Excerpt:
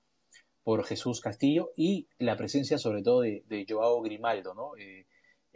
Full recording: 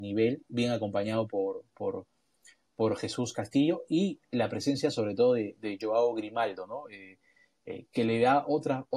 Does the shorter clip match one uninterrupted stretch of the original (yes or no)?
yes